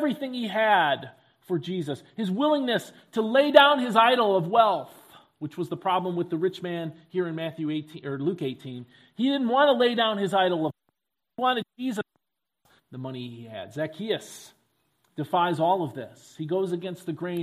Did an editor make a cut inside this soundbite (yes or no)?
yes